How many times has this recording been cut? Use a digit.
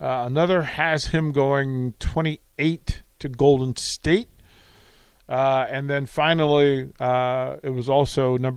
1